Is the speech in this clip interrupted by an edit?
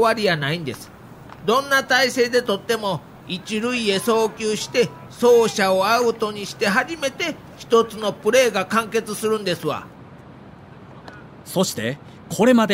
no; 0 cuts

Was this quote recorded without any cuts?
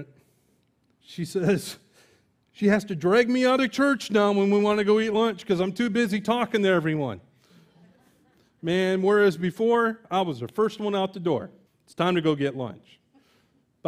no; 1 cut; at 11.7 s

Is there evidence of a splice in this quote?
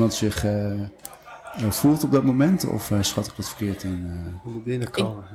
no; 0 cuts

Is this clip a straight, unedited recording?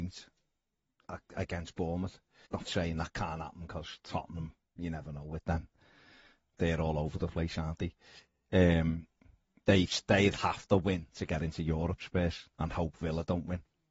no; 1 cut; at 2.4 s

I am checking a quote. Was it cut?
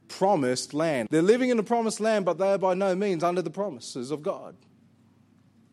yes; 1 cut; at 1.1 s

